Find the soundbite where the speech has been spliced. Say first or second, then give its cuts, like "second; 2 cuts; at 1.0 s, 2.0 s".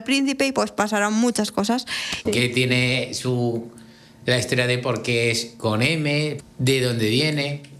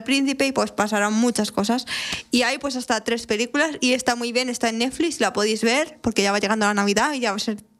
first; 2 cuts; at 2.3 s, 6.4 s